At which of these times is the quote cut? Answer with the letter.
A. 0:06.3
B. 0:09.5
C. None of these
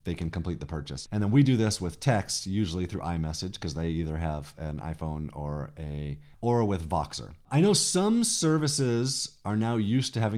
A